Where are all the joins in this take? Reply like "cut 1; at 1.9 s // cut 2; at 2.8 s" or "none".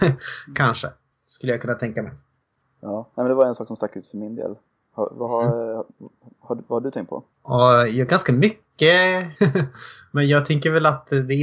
cut 1; at 7.3 s // cut 2; at 9.4 s